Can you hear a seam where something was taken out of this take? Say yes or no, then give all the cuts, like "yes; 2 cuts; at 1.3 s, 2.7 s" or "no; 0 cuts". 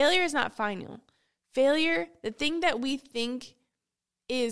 no; 0 cuts